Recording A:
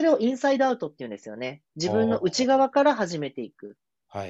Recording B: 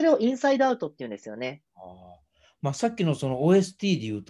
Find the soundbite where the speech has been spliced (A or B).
B